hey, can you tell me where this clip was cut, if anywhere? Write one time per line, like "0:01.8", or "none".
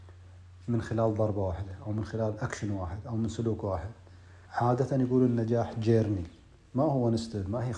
0:04.4